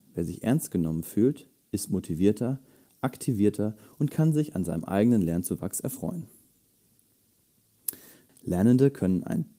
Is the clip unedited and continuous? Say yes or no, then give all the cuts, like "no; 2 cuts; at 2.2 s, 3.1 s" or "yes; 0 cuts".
no; 1 cut; at 8.3 s